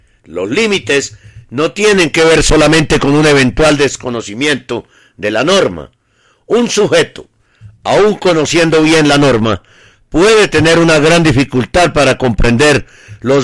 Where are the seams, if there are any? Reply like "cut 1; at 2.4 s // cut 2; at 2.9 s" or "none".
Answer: none